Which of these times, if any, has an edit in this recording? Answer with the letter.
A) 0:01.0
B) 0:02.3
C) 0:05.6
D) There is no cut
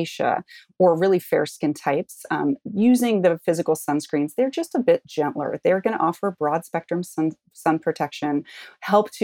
D